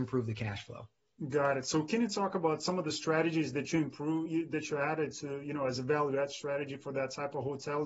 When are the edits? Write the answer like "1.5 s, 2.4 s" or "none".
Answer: none